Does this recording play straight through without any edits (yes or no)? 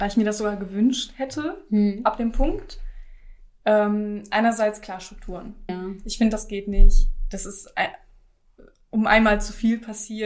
no